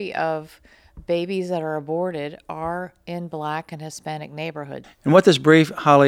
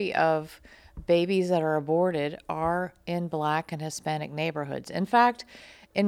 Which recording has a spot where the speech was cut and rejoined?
first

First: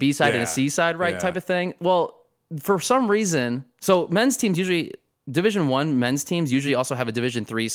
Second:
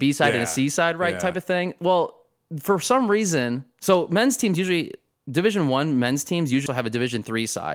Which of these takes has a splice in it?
second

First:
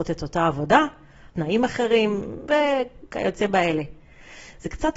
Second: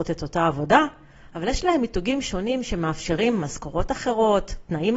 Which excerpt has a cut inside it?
first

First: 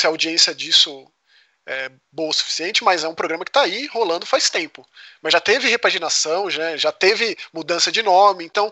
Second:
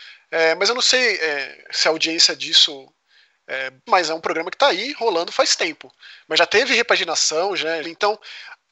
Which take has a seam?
second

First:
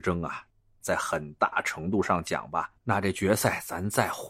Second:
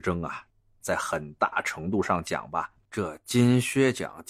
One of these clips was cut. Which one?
first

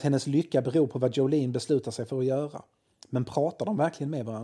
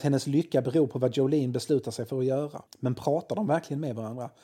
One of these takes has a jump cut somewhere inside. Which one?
second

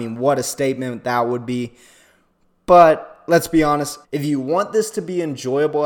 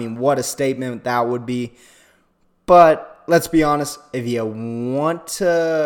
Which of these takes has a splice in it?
first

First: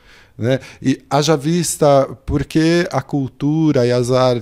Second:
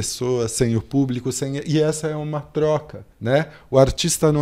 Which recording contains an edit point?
second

